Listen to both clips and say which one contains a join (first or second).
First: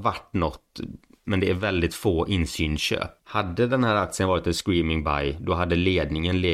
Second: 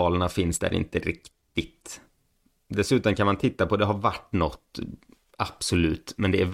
first